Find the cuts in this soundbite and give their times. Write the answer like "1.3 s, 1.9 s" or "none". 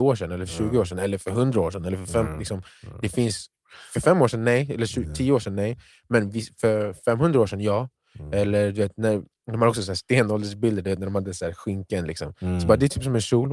none